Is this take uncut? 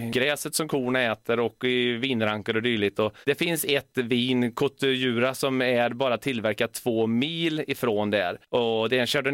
no; 1 cut; at 3.2 s

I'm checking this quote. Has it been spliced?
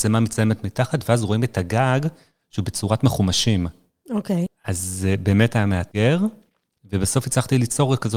yes; 1 cut; at 4.5 s

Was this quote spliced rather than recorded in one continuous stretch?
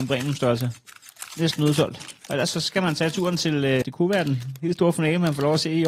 yes; 2 cuts; at 2.3 s, 3.8 s

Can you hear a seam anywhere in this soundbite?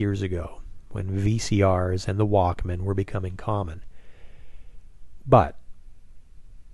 yes; 1 cut; at 5.2 s

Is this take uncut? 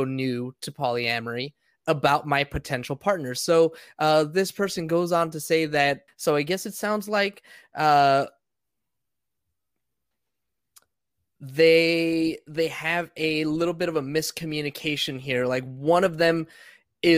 no; 1 cut; at 6.1 s

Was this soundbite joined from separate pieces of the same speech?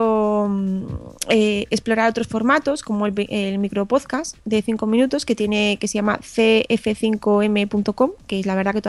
no; 0 cuts

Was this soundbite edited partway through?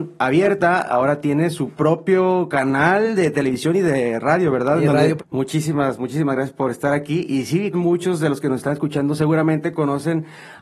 yes; 2 cuts; at 5.2 s, 7.7 s

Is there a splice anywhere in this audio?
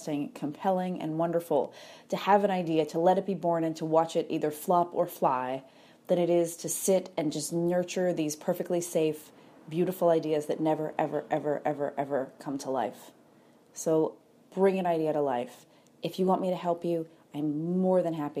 no; 0 cuts

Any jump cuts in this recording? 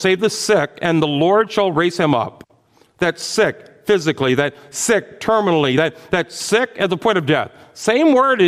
no; 0 cuts

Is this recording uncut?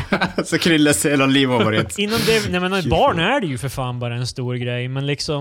yes; 0 cuts

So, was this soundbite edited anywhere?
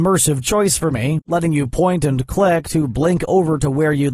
yes; 1 cut; at 1.2 s

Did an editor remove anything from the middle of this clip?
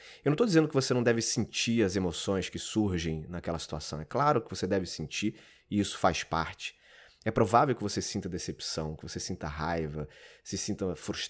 no; 0 cuts

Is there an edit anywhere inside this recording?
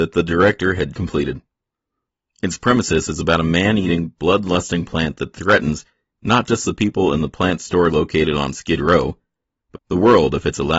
yes; 2 cuts; at 0.9 s, 9.7 s

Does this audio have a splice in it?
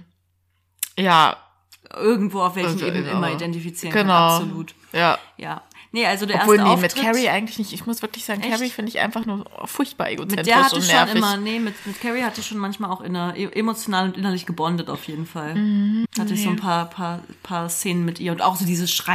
yes; 1 cut; at 16.0 s

